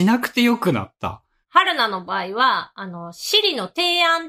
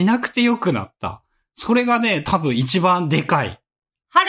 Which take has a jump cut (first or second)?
first